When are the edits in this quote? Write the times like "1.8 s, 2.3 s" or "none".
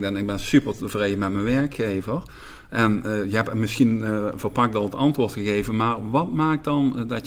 none